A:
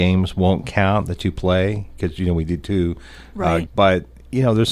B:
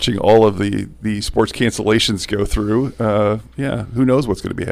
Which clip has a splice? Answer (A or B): A